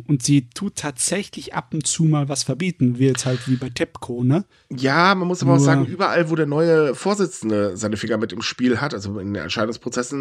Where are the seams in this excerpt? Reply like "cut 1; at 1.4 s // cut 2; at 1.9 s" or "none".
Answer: none